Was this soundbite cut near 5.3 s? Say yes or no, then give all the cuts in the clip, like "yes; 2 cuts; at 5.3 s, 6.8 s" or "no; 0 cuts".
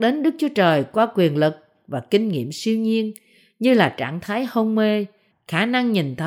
yes; 1 cut; at 5.3 s